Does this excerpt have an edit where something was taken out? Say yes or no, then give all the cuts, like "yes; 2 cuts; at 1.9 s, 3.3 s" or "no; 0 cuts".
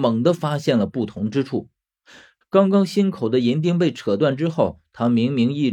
yes; 1 cut; at 2.4 s